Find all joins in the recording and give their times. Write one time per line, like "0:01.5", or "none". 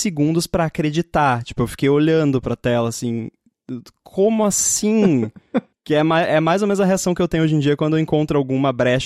0:05.7

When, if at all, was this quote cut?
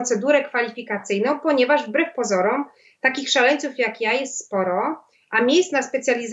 none

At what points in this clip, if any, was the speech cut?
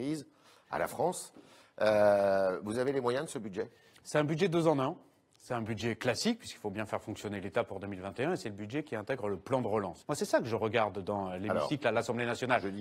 0:10.0

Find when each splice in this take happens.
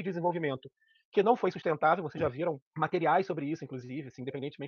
0:02.7

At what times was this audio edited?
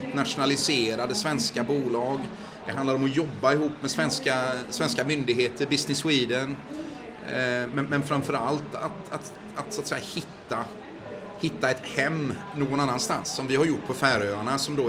none

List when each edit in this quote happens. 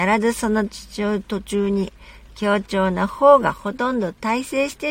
none

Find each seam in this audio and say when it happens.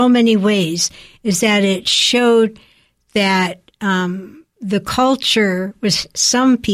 none

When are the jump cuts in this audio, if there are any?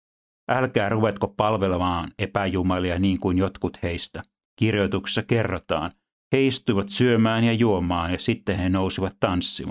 none

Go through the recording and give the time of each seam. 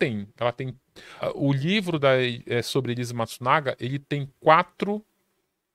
0:01.2

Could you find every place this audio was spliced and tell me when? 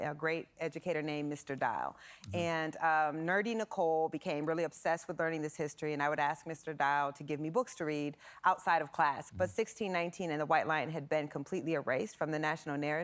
0:09.3

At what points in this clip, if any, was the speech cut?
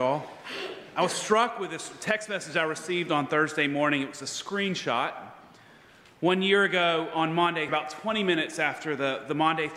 0:07.7

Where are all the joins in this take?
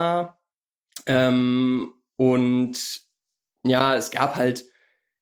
none

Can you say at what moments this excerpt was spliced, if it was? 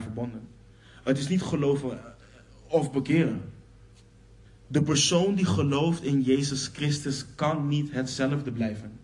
0:04.4

